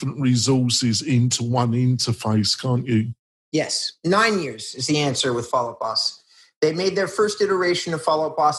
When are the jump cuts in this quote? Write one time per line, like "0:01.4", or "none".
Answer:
none